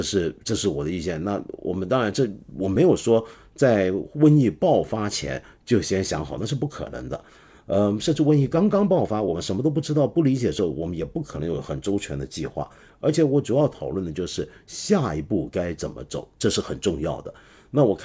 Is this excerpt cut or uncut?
cut